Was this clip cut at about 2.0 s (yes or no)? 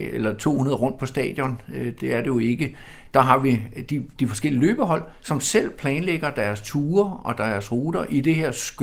no